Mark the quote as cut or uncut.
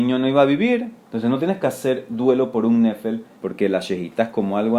cut